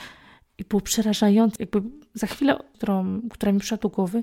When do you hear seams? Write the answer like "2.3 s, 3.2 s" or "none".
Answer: 1.6 s, 2.7 s